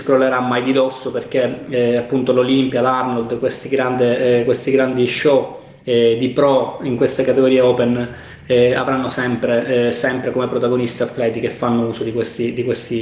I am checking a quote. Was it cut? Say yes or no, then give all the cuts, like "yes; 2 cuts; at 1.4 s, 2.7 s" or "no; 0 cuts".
no; 0 cuts